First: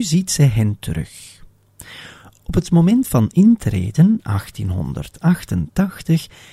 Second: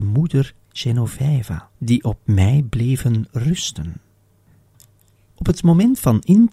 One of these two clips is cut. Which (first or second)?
second